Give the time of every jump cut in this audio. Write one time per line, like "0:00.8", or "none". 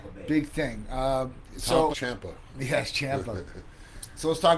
0:01.9